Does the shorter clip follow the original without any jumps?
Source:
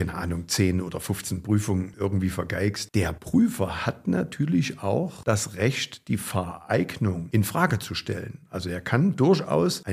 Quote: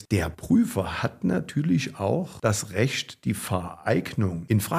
yes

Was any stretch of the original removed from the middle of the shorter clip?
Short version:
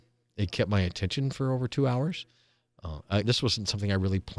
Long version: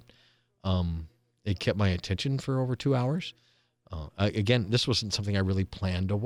yes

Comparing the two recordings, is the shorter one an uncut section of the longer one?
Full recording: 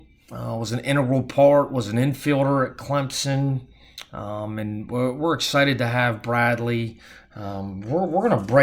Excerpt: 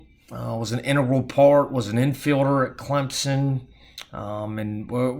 yes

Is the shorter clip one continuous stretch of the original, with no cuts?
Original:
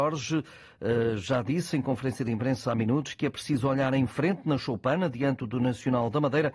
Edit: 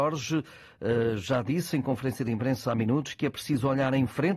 yes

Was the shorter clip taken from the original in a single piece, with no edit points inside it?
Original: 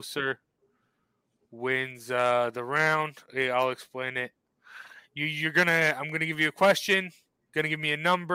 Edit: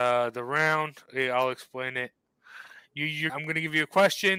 no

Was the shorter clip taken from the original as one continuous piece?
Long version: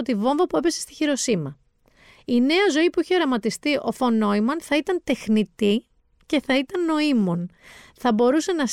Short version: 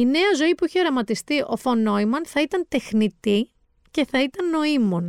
yes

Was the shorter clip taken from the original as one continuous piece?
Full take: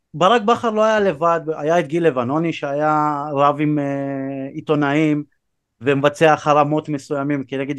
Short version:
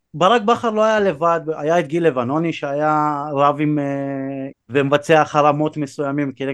no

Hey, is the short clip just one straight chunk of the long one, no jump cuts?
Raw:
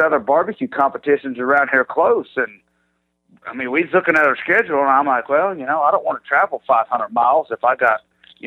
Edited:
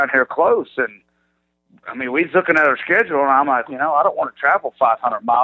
no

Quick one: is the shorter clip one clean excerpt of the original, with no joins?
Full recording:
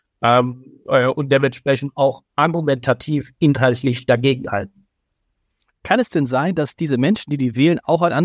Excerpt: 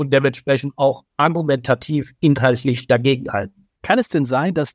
no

